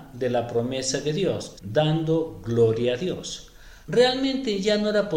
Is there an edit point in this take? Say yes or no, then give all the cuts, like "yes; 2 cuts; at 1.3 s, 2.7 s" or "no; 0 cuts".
yes; 2 cuts; at 1.6 s, 3.8 s